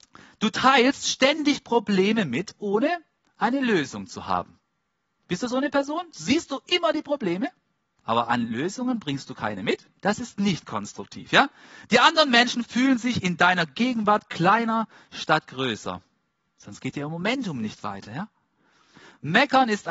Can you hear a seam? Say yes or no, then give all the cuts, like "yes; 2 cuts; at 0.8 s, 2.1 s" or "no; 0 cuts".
yes; 2 cuts; at 10.0 s, 16.5 s